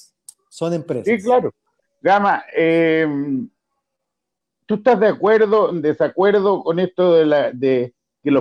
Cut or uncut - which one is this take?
cut